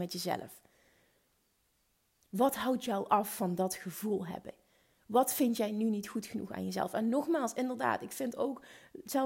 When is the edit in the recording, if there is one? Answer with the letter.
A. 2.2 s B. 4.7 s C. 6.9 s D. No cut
D